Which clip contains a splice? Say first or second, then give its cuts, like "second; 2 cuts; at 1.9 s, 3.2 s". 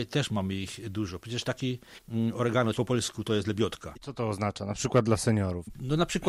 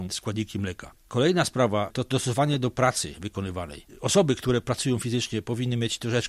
first; 2 cuts; at 2.7 s, 3.9 s